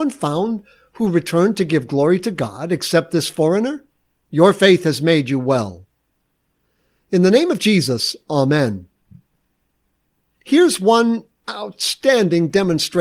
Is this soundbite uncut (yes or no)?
no